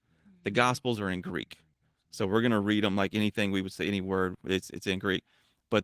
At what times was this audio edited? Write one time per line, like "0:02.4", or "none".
none